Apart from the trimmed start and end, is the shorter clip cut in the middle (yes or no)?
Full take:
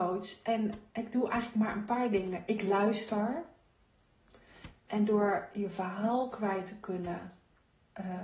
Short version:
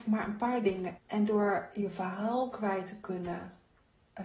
yes